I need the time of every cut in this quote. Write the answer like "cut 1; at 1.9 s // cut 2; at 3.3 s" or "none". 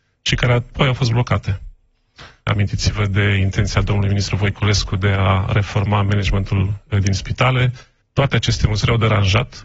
cut 1; at 2.5 s // cut 2; at 8.0 s